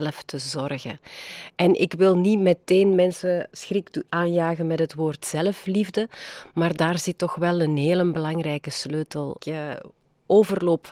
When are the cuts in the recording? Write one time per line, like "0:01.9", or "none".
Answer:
0:03.5
0:09.4